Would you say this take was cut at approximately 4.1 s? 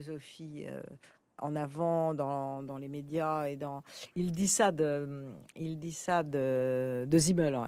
yes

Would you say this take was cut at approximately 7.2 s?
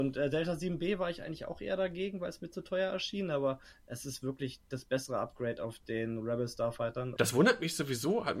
yes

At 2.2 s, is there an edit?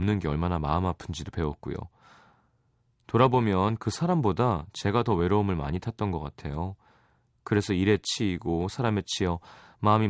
no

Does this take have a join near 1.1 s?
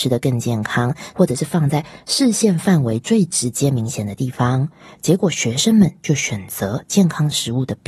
yes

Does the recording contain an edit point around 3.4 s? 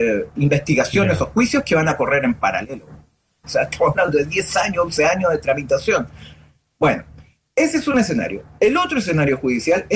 yes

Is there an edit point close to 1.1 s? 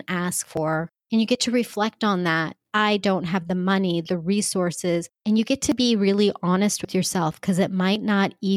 no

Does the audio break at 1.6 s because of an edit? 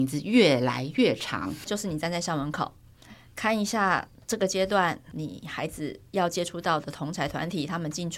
yes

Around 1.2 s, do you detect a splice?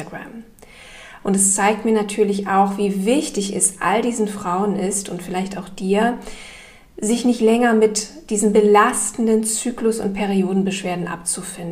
yes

